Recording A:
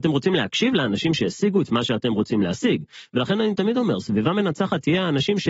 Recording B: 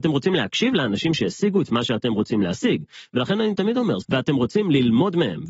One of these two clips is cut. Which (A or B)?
B